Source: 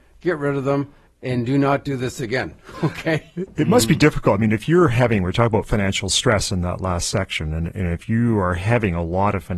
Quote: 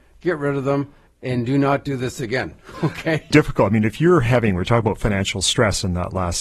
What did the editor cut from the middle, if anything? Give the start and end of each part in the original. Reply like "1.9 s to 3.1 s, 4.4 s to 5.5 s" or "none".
3.3 s to 4.0 s